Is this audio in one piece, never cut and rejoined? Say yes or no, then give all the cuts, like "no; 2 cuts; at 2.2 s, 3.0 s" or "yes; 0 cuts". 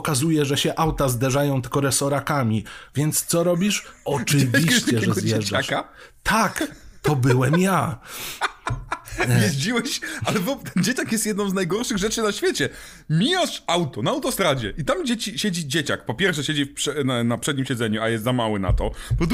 yes; 0 cuts